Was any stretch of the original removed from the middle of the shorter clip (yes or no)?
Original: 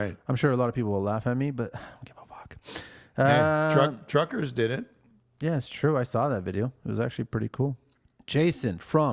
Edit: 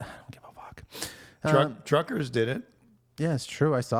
yes